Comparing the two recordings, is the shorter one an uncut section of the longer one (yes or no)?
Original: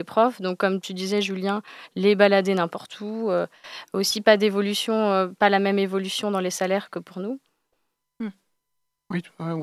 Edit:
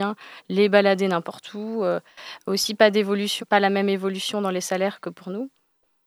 no